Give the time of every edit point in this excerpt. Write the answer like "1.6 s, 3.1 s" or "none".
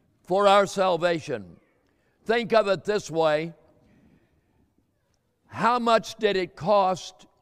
none